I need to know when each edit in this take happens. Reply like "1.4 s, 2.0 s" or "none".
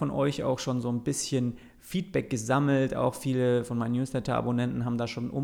none